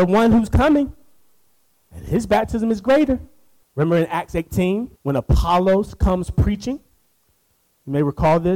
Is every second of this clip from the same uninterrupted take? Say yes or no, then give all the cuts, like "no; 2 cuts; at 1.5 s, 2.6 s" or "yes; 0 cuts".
no; 2 cuts; at 3.6 s, 5.0 s